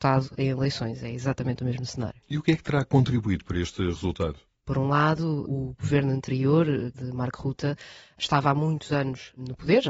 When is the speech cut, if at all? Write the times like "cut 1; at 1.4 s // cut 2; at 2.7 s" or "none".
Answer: cut 1; at 4.6 s // cut 2; at 6.9 s